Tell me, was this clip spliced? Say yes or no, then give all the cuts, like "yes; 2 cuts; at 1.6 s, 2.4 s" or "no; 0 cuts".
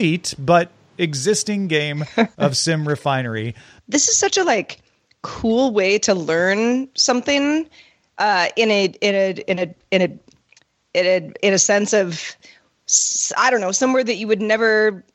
yes; 2 cuts; at 3.8 s, 11.4 s